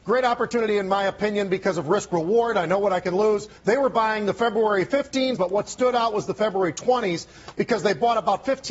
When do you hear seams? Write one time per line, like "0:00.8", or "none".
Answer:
0:03.6
0:05.4

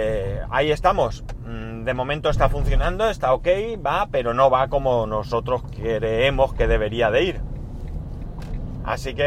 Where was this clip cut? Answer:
none

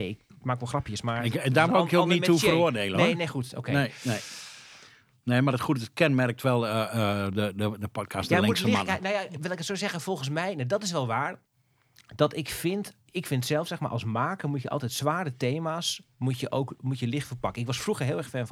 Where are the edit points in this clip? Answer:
0:13.1

